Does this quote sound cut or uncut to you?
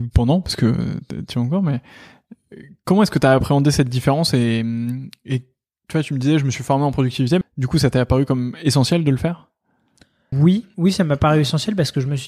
cut